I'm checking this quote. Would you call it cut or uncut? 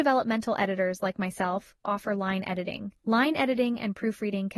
cut